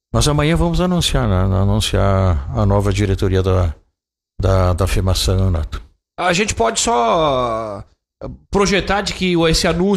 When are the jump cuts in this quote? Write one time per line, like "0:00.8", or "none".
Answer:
none